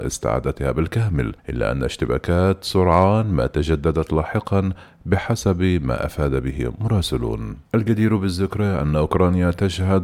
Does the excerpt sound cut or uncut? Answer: cut